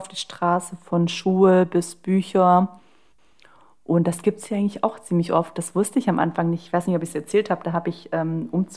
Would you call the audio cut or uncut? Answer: uncut